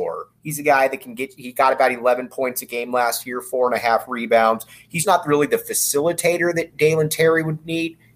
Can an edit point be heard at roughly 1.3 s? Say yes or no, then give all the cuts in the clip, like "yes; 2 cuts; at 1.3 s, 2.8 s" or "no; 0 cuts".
no; 1 cut; at 5.0 s